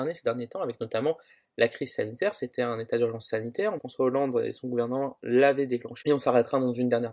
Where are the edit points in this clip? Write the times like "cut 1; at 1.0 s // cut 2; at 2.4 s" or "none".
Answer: cut 1; at 3.8 s // cut 2; at 6.0 s

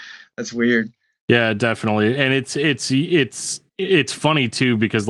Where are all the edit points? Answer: cut 1; at 1.2 s

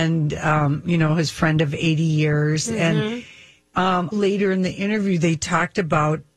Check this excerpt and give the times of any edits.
cut 1; at 4.1 s

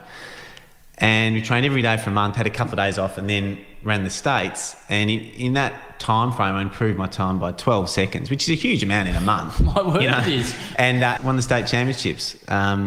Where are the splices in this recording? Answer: cut 1; at 11.2 s

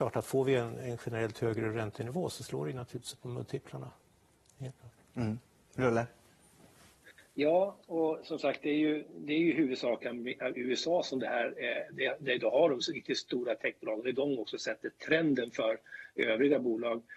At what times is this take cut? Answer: none

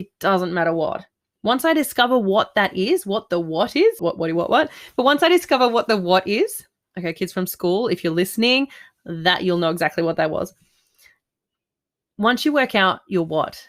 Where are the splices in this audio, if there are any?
cut 1; at 1.3 s // cut 2; at 4.0 s

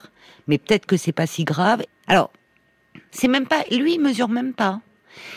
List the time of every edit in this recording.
cut 1; at 1.9 s // cut 2; at 3.1 s

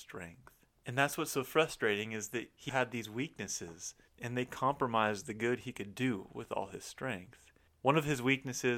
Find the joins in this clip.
cut 1; at 2.7 s

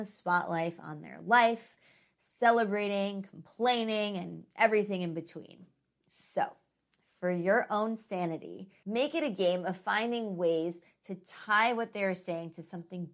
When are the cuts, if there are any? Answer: cut 1; at 8.8 s

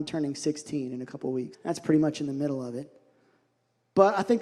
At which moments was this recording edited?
cut 1; at 1.5 s

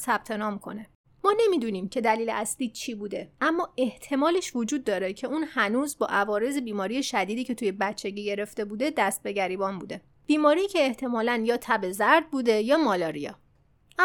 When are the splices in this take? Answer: cut 1; at 1.0 s // cut 2; at 3.4 s

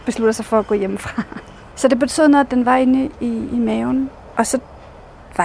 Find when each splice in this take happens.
none

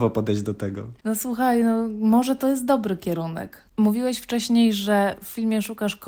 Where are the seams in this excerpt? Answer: none

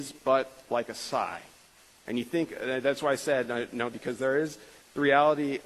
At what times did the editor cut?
cut 1; at 2.0 s // cut 2; at 3.9 s

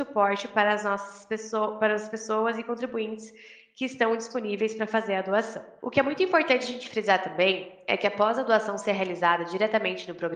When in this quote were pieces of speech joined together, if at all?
cut 1; at 5.8 s

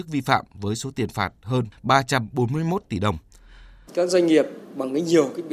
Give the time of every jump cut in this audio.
cut 1; at 3.9 s

